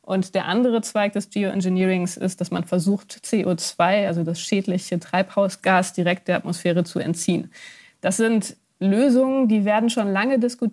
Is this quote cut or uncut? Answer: uncut